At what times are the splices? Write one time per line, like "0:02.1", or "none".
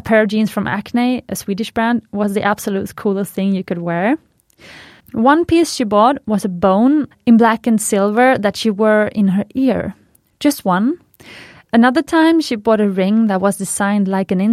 0:05.0
0:07.1
0:11.6